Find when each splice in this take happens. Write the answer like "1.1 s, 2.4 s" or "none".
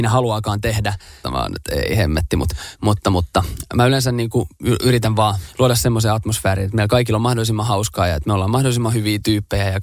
1.2 s